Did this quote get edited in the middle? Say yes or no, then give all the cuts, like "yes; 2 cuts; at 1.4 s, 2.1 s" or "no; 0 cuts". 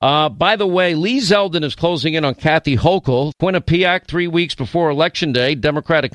yes; 1 cut; at 3.3 s